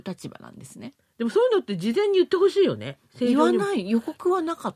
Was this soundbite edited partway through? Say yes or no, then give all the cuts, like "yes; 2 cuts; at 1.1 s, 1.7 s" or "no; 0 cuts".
no; 0 cuts